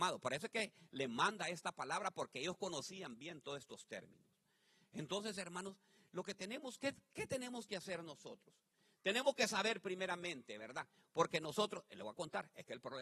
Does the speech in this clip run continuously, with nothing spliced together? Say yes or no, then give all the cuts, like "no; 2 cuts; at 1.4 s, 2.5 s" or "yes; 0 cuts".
yes; 0 cuts